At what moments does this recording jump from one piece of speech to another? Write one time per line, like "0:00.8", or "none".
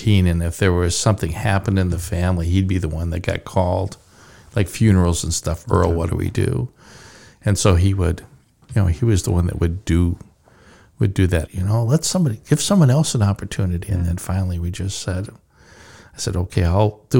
0:11.5